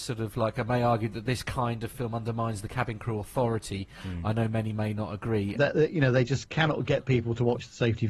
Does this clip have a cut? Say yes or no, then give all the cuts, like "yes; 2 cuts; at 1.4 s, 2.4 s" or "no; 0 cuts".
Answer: yes; 1 cut; at 5.6 s